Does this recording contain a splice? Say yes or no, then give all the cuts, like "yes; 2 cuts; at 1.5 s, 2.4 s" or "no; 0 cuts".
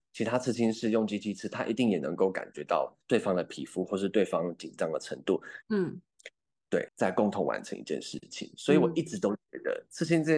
yes; 2 cuts; at 5.6 s, 6.9 s